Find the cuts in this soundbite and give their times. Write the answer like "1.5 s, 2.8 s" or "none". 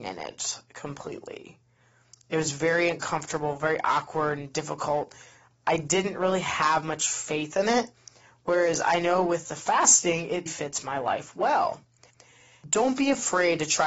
10.5 s